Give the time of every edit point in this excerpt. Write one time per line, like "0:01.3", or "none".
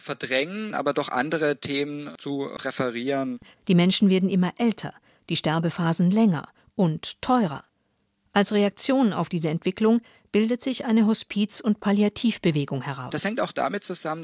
0:03.5